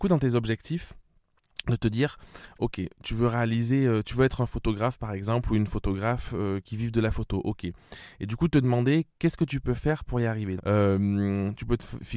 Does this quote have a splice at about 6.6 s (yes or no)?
yes